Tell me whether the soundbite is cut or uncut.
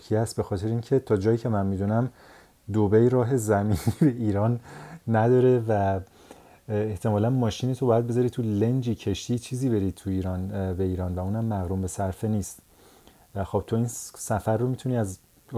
uncut